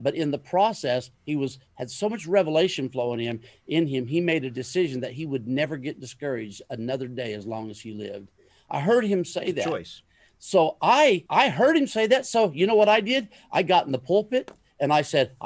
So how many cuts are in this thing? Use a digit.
1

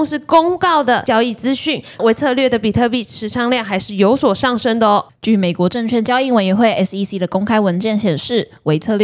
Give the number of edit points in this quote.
2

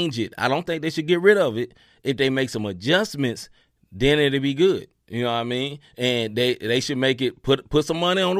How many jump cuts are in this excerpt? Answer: 0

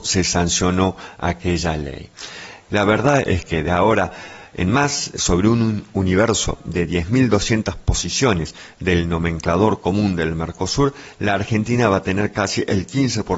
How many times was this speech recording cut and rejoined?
1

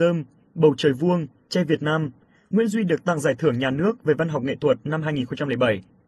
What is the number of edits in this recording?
1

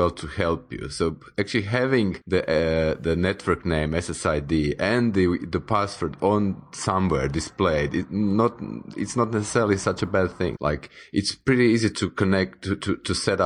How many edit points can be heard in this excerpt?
2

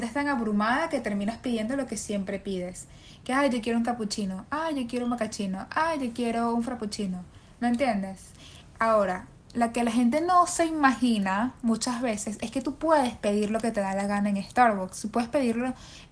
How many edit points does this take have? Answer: 0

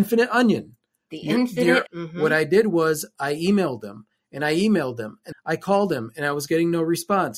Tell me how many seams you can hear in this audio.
2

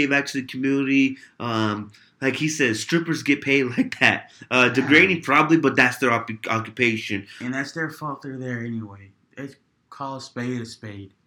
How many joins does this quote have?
0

